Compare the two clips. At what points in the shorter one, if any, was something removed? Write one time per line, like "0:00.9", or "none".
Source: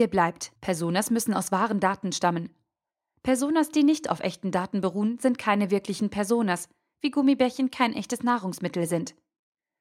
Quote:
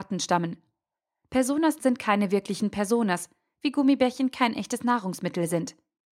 0:01.8